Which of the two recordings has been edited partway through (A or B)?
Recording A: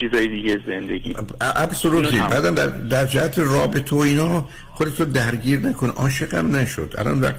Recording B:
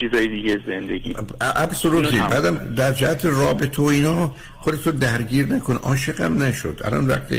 B